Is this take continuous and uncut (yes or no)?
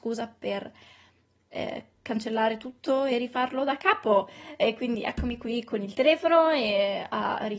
yes